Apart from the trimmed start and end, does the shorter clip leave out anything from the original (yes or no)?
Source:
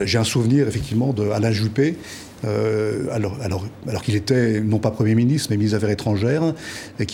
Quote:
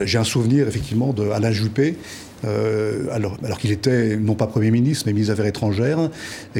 yes